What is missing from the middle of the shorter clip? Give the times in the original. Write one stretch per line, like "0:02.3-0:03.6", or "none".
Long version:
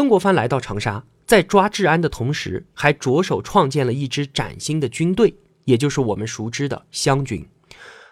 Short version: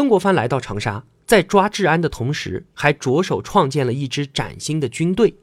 none